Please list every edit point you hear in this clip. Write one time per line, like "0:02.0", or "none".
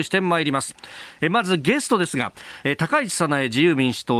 none